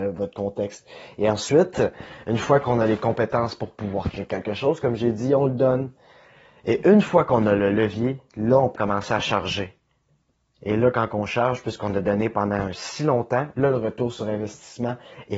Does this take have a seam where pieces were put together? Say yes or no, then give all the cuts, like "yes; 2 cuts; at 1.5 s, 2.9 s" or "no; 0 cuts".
yes; 2 cuts; at 8.8 s, 13.5 s